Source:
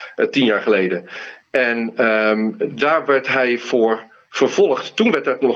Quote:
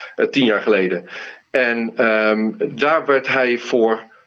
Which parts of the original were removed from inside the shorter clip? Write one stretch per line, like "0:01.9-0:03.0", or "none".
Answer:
none